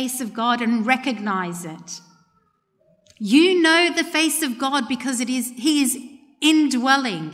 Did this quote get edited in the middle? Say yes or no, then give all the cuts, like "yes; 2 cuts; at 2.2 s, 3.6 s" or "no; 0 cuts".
no; 0 cuts